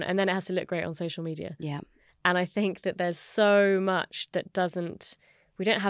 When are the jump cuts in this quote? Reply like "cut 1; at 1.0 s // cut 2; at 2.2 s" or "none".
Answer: none